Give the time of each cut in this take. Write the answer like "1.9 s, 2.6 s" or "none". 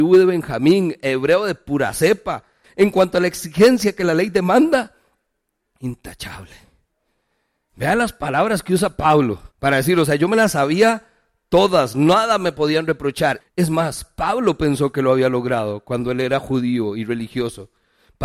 2.6 s, 9.5 s, 13.4 s